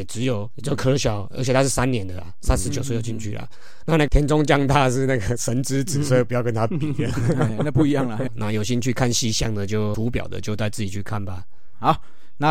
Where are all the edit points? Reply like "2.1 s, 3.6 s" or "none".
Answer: 8.3 s, 9.9 s